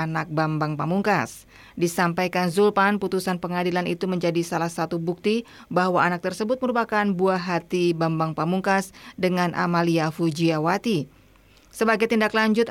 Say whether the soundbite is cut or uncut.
uncut